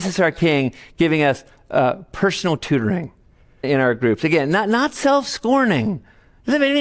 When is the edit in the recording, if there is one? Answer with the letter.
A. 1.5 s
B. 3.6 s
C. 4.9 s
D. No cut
B